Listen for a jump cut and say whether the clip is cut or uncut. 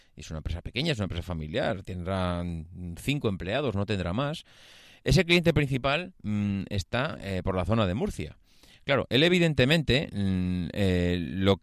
uncut